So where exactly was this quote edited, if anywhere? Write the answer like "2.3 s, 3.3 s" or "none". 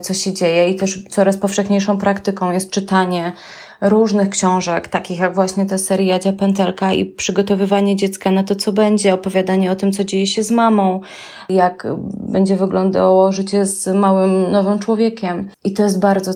none